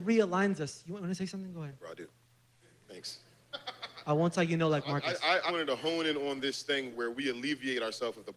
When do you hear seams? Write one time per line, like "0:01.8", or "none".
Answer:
0:05.5
0:06.9

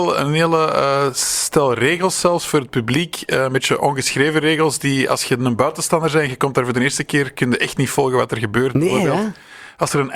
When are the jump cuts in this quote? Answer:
none

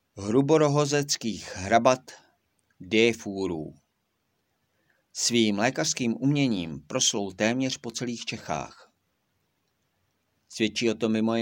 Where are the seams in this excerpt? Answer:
none

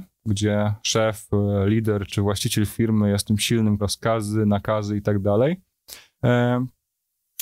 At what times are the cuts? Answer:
0:02.1
0:03.8
0:06.2

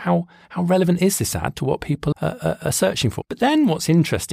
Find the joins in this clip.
0:02.1
0:03.2

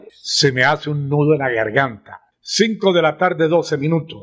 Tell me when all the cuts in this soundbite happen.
none

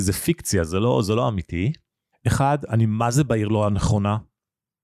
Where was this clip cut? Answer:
0:02.1

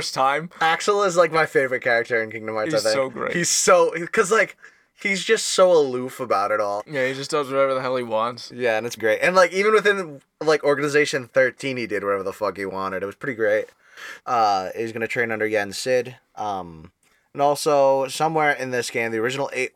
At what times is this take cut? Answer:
0:06.8
0:09.0
0:14.2

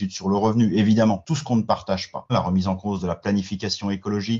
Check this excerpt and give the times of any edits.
0:01.2
0:02.3

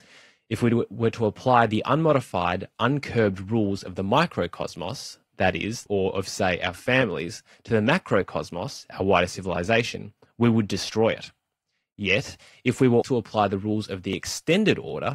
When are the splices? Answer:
0:05.9
0:13.0

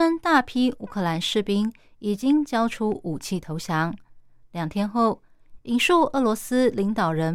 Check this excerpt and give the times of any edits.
0:04.4
0:05.6

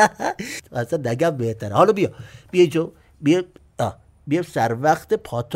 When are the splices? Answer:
none

